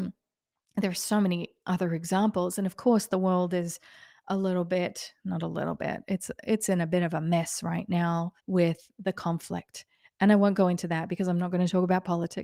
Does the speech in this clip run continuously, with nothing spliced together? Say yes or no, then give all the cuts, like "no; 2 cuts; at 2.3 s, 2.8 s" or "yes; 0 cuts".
no; 1 cut; at 8.4 s